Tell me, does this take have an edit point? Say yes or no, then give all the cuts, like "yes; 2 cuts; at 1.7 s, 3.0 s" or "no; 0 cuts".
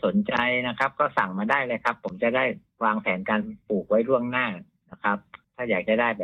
no; 0 cuts